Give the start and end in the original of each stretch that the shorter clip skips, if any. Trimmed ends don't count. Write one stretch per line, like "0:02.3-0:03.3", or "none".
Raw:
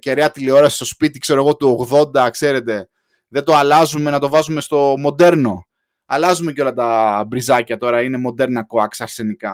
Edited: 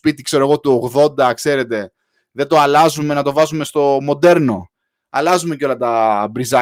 none